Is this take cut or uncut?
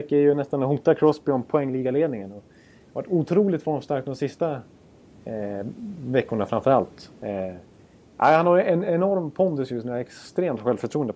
uncut